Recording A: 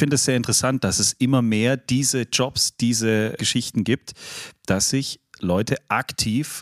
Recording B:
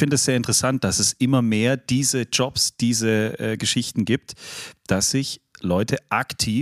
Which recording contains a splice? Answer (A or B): A